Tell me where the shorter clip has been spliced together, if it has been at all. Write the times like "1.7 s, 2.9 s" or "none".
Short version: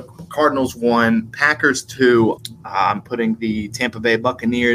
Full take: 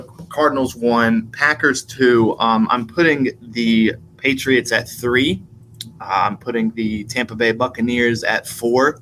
2.4 s